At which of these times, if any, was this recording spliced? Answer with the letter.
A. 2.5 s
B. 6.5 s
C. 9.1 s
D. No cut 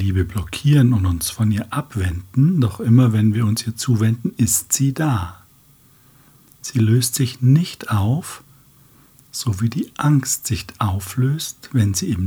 D